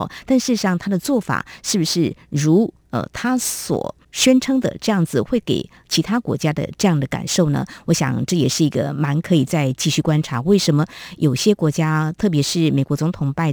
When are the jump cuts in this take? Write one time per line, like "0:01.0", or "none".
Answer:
none

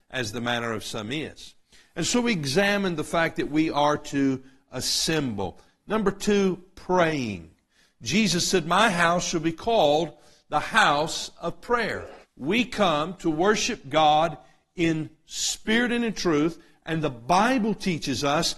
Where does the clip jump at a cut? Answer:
0:12.2

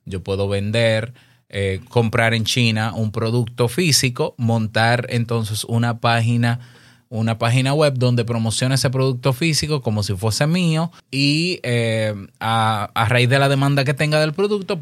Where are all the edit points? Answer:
0:11.0

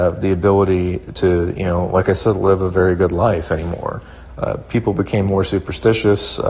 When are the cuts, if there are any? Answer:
0:04.3

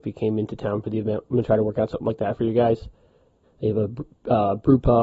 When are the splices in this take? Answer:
0:03.4

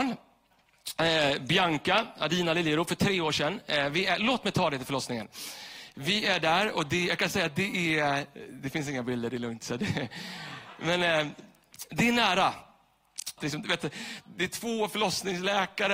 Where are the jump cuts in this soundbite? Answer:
0:13.4

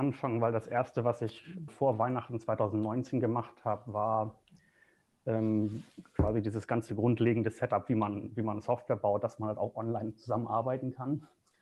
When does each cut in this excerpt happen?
0:01.7

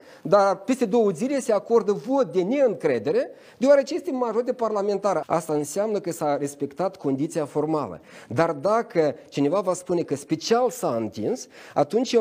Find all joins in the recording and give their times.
0:05.2

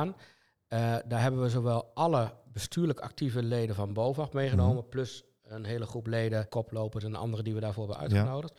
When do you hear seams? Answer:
0:06.5

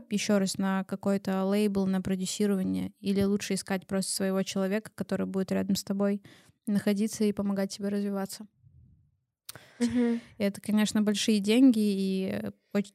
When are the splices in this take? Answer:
0:09.8

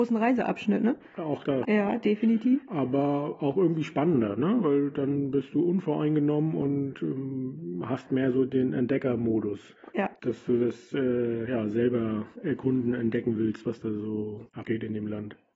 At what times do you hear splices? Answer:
0:01.6

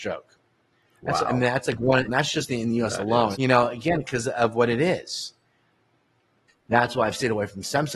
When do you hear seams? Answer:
0:02.1
0:03.3
0:06.5

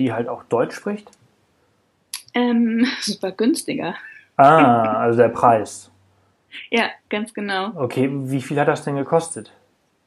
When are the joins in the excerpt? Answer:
none

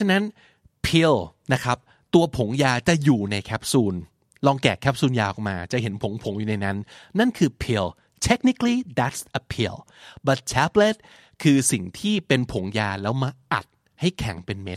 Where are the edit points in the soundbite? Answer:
none

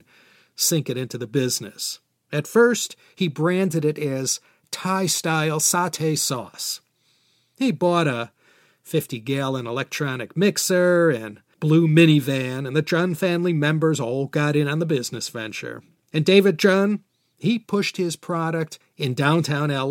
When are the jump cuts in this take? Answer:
none

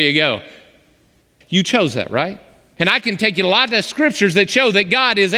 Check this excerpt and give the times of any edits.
0:01.4
0:02.8

